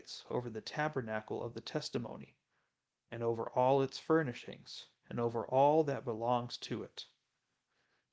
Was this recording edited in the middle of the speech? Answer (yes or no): no